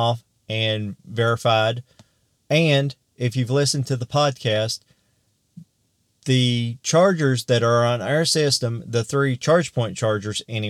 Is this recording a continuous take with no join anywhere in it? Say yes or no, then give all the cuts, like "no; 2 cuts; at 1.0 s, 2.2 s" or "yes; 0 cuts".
no; 1 cut; at 2.4 s